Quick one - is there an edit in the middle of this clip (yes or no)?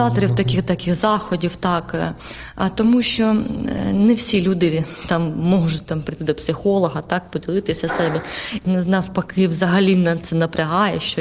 yes